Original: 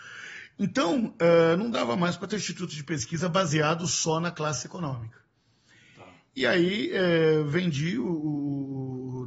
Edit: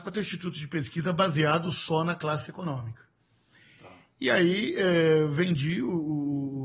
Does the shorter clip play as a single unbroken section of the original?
yes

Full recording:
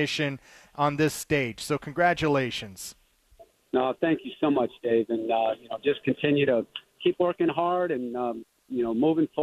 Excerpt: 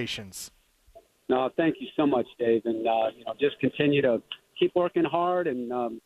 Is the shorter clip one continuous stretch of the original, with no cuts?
yes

